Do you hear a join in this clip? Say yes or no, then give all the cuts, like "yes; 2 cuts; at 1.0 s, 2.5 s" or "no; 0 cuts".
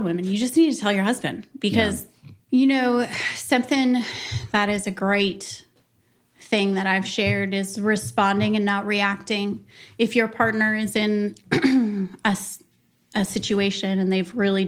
yes; 1 cut; at 2.5 s